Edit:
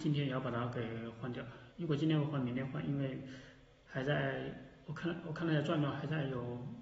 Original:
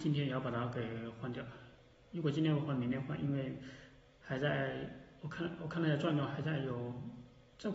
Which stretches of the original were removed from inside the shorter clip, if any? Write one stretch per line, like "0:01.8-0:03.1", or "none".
0:01.7-0:02.1